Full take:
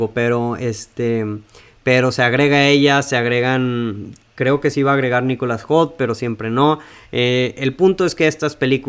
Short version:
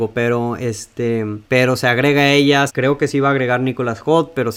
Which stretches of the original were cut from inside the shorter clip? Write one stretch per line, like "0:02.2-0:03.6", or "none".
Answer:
0:01.4-0:01.8
0:03.0-0:04.3

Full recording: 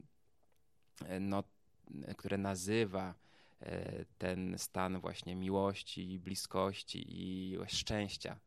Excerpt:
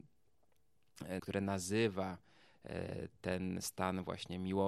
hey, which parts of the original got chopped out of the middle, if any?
0:01.2-0:02.2

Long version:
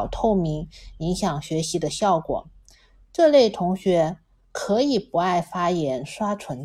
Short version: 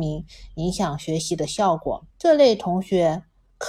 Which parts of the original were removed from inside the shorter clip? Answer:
0:02.5-0:03.0

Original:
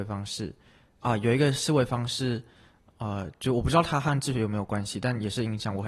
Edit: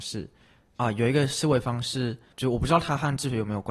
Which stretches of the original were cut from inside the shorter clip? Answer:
0:02.6-0:03.4

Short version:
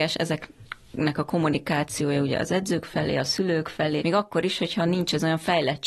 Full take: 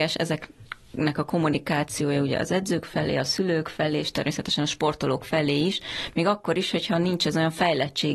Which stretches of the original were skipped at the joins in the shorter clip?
0:04.0-0:06.1

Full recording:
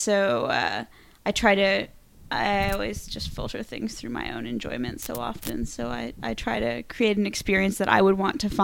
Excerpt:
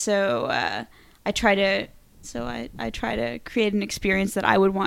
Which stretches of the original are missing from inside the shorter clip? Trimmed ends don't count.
0:02.2-0:05.7

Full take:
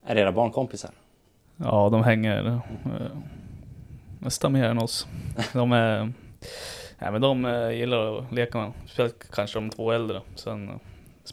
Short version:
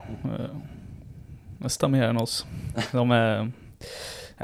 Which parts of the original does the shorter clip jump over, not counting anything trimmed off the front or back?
none

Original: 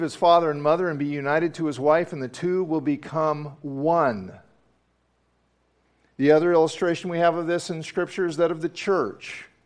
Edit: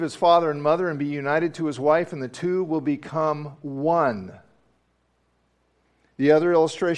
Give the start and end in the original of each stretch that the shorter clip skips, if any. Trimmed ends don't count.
none

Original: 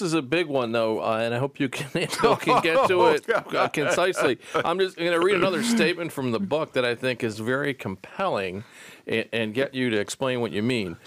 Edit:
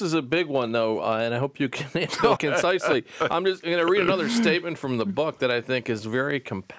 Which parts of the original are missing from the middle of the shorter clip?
0:02.4-0:03.7

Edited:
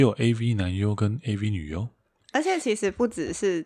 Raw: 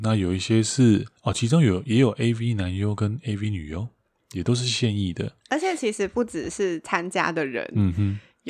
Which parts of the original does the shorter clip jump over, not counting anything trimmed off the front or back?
0:04.2-0:05.4

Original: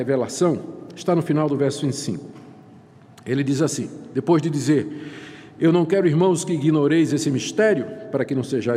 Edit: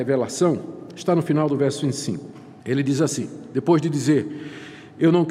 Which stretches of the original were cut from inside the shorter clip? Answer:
0:02.6-0:03.2

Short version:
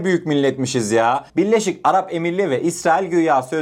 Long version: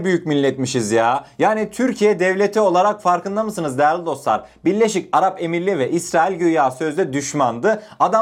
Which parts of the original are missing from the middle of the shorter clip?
0:01.3-0:04.6

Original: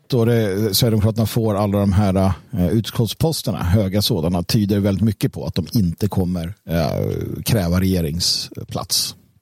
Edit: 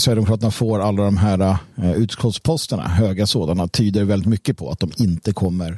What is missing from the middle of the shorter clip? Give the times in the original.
none

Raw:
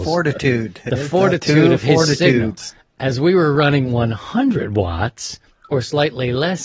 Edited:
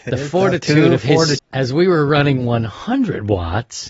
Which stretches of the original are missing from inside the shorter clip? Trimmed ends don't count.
0:02.2-0:02.9

